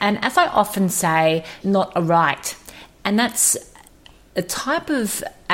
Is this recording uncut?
no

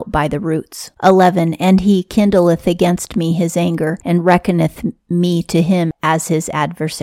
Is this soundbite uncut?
no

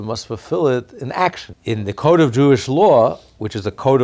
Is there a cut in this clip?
yes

